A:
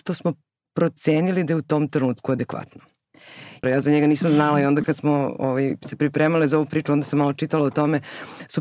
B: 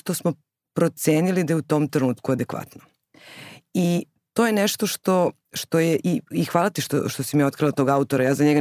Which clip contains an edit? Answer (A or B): A